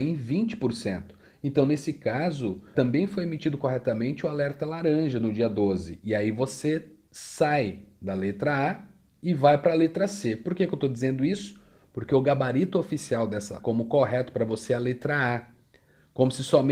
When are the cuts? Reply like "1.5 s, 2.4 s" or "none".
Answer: 2.7 s, 13.6 s